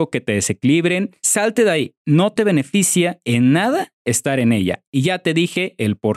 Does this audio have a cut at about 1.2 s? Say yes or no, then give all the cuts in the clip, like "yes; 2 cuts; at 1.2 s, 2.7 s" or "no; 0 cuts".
yes; 1 cut; at 1.2 s